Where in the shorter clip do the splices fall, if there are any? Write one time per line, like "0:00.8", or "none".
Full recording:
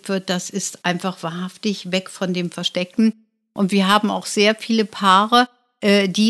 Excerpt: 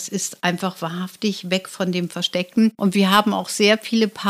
0:02.7